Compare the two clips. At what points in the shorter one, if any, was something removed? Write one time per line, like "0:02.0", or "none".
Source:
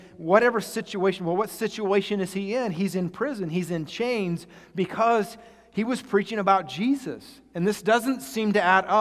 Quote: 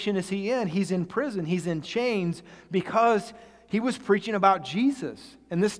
none